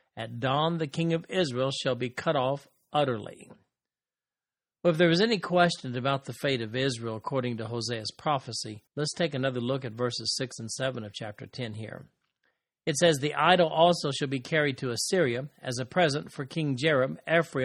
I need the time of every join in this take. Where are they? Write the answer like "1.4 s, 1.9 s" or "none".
8.9 s